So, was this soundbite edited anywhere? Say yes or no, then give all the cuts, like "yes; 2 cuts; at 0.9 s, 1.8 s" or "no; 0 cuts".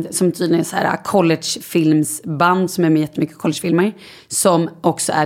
no; 0 cuts